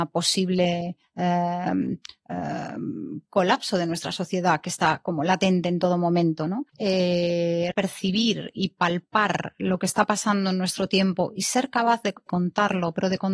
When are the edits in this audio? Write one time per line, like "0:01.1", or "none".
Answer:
0:06.7
0:07.7
0:12.3